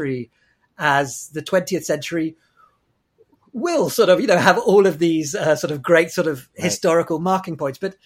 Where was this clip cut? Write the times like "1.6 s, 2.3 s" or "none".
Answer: none

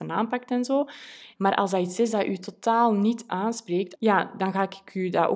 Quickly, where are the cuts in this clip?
1.3 s, 4.0 s

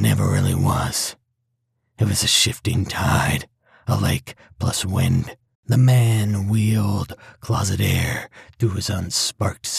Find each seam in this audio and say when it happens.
5.5 s

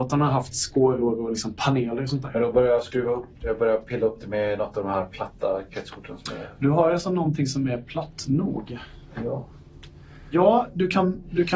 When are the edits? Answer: 3.4 s

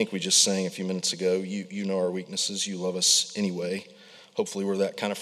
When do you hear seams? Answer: none

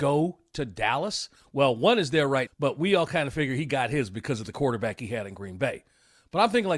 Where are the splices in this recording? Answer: 2.5 s

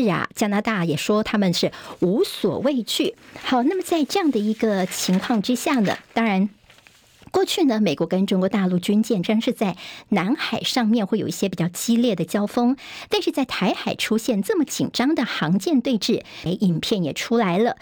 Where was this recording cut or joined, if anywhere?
9.2 s, 16.5 s

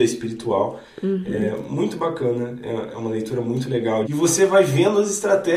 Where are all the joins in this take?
4.0 s

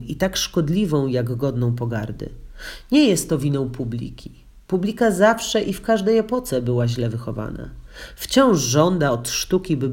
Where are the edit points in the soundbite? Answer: none

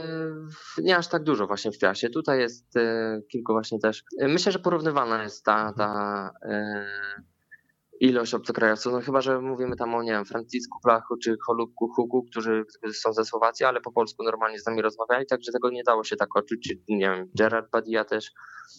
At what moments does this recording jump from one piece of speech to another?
4.1 s

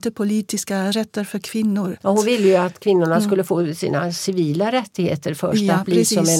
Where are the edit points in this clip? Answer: none

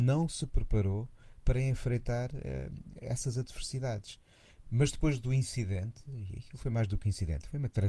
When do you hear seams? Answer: 4.7 s

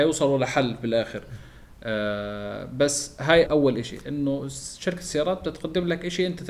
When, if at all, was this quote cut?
3.5 s

